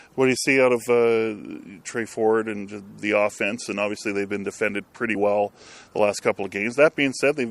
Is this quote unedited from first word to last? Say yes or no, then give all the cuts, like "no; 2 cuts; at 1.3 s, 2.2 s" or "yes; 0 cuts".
yes; 0 cuts